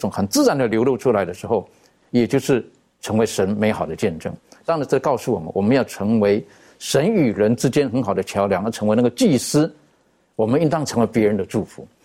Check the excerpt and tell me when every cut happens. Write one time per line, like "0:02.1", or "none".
none